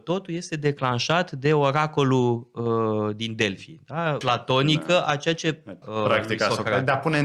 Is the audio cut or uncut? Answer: cut